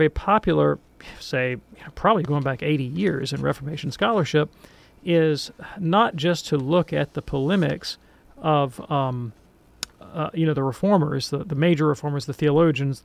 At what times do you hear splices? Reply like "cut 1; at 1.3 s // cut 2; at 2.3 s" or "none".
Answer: cut 1; at 2.3 s